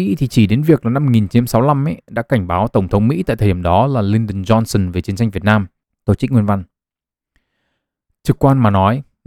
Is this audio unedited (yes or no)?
no